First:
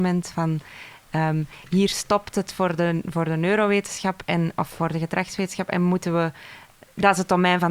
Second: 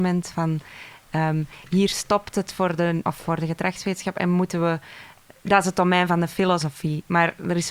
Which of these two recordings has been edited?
second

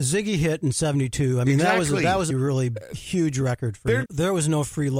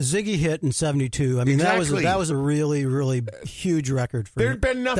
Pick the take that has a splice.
first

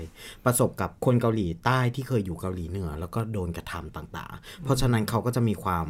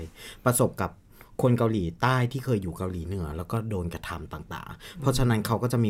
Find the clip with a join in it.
first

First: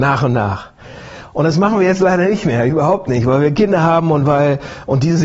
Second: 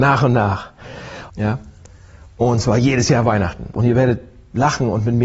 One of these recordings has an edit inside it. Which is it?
second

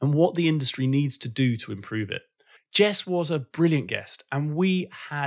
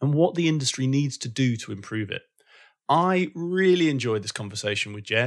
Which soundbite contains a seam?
first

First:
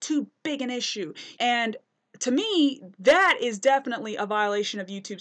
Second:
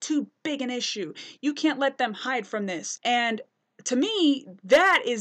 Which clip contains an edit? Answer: first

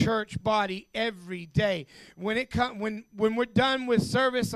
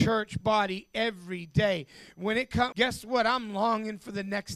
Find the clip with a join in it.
second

